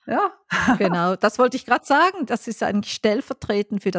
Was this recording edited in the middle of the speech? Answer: no; 0 cuts

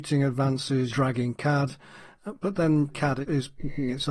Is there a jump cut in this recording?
yes; 2 cuts; at 0.9 s, 2.9 s

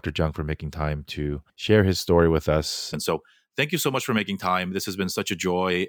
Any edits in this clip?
yes; 2 cuts; at 1.5 s, 2.9 s

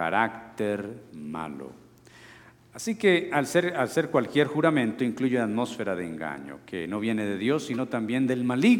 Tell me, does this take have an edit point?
no; 0 cuts

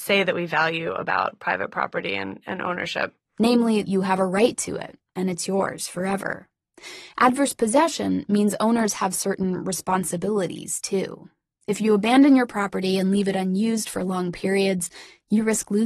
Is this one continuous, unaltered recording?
no; 1 cut; at 3.8 s

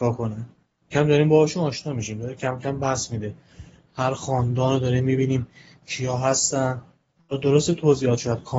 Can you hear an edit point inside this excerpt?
yes; 1 cut; at 0.9 s

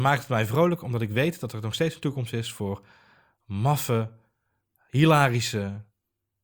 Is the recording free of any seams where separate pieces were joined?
yes; 0 cuts

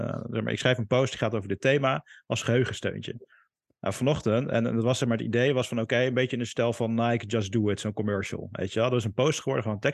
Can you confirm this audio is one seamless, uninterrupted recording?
yes; 0 cuts

